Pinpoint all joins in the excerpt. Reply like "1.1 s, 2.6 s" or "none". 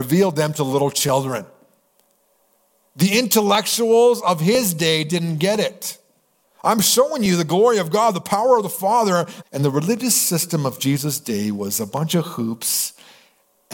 6.4 s, 9.4 s